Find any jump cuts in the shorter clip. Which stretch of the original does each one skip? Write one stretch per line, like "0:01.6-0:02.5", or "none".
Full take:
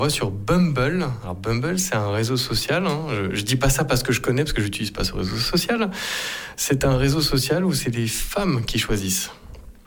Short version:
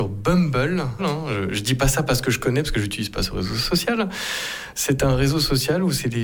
0:01.2-0:02.8